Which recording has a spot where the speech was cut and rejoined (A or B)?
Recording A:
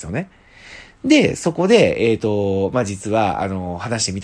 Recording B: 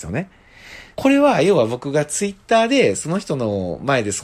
B